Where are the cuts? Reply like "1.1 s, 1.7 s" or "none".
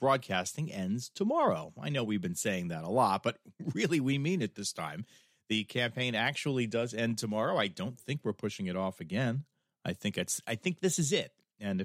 none